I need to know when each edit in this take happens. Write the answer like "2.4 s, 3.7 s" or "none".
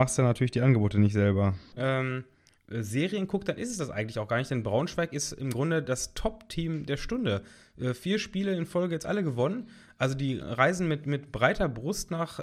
1.8 s, 10.4 s